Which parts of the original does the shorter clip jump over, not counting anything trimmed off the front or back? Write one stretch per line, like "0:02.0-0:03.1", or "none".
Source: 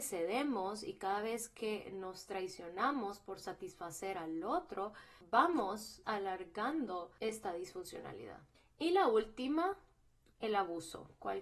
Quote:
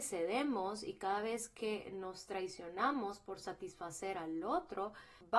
none